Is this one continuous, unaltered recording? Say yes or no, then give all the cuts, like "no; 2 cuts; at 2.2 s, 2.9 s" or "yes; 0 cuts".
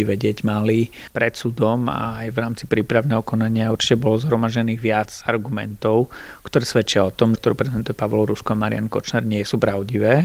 no; 2 cuts; at 1.1 s, 7.3 s